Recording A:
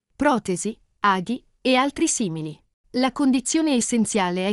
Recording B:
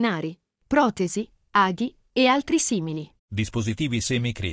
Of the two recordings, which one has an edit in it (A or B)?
B